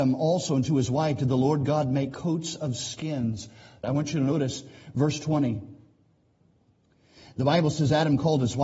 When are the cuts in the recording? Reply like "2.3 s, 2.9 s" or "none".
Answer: 3.8 s